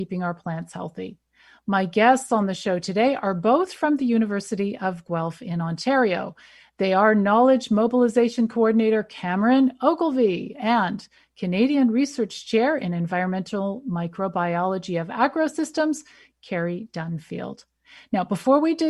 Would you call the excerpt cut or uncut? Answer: uncut